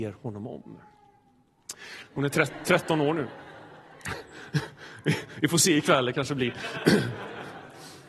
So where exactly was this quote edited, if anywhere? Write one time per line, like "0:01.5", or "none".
0:02.0

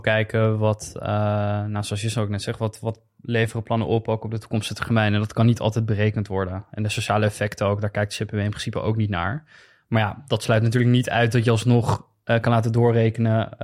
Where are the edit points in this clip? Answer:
none

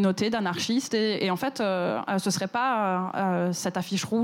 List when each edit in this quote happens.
none

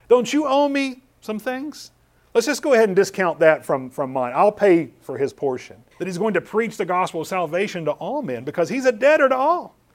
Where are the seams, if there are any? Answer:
0:05.9

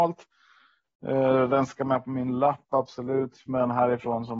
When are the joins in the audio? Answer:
none

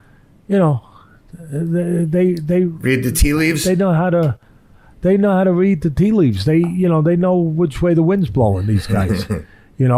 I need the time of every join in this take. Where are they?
none

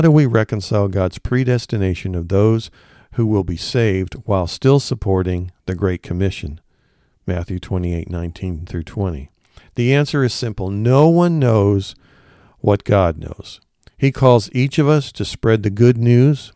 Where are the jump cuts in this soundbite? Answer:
none

